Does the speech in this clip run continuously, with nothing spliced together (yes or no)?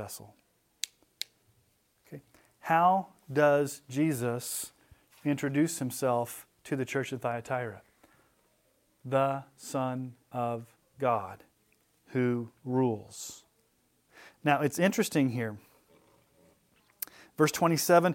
yes